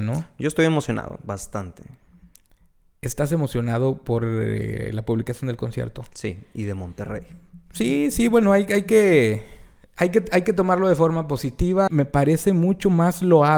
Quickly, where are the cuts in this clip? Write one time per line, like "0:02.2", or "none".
0:11.9

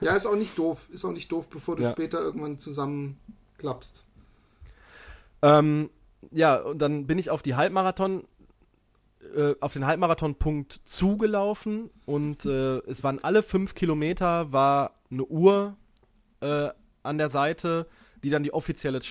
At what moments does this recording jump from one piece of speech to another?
none

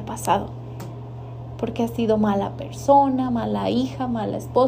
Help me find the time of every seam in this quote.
none

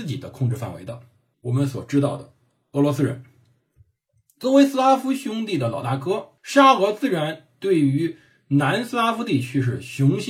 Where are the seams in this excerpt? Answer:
0:01.3
0:06.4

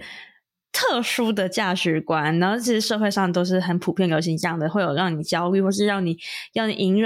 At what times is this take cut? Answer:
none

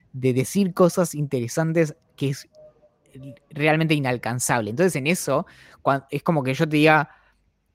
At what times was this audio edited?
none

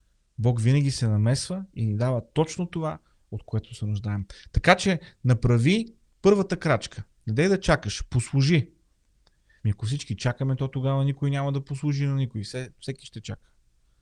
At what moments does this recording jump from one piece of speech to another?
0:09.6

